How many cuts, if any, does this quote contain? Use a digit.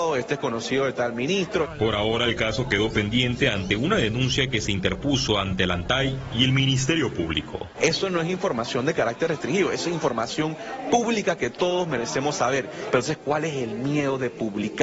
2